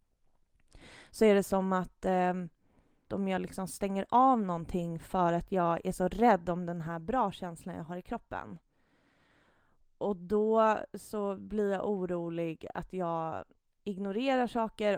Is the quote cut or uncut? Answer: cut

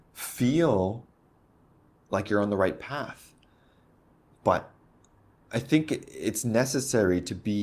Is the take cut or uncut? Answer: uncut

